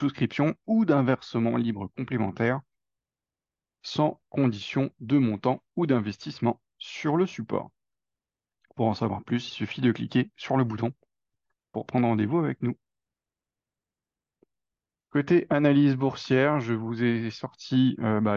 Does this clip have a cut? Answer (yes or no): yes